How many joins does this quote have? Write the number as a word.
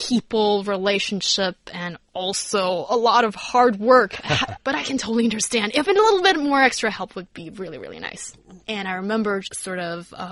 two